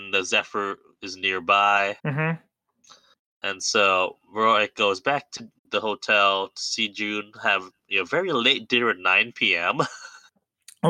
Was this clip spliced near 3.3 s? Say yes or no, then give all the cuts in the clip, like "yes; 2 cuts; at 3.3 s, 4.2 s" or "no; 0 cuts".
no; 2 cuts; at 2.0 s, 5.6 s